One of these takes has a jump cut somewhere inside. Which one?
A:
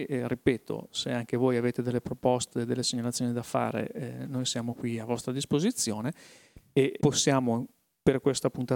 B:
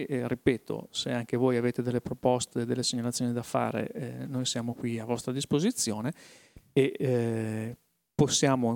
A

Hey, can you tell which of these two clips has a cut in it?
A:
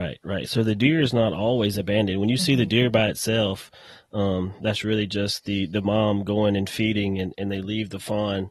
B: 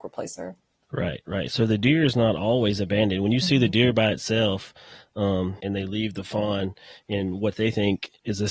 B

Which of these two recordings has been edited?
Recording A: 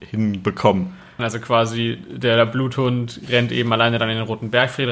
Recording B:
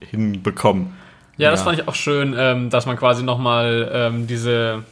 A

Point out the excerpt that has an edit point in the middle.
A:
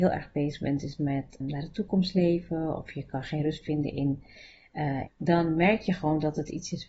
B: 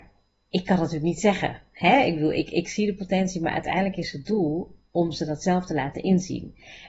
A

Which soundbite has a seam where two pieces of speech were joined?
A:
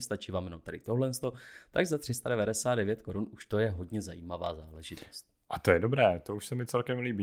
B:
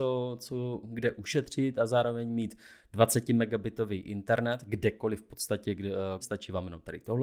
B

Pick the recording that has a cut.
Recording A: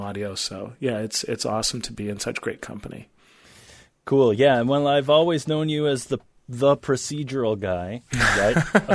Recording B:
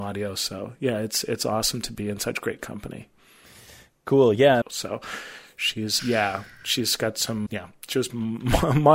B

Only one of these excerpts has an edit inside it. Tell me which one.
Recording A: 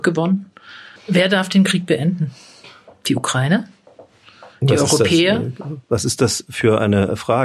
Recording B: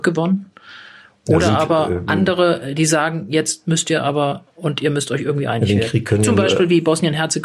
A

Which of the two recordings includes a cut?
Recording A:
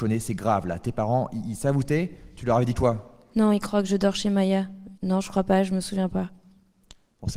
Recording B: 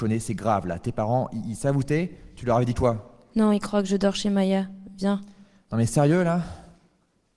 A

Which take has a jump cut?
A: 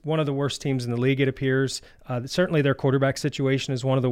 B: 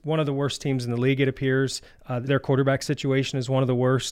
B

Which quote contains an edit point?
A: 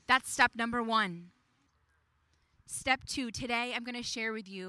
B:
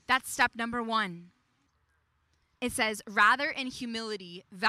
B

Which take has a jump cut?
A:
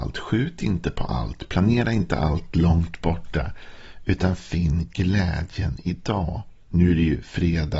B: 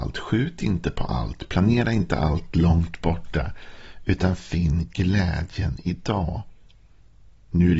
A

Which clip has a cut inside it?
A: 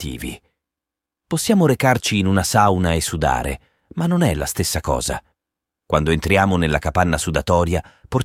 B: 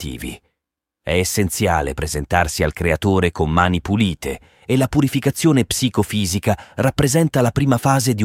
B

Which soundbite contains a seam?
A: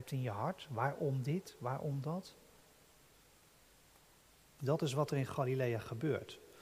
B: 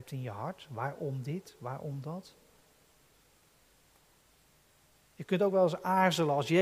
A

